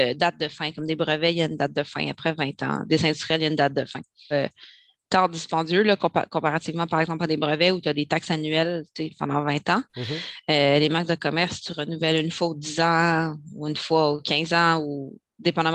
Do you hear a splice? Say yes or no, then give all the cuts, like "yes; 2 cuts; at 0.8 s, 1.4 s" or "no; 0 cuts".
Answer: yes; 1 cut; at 4.3 s